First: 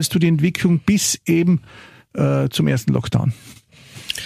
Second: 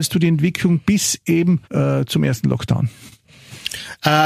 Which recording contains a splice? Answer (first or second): second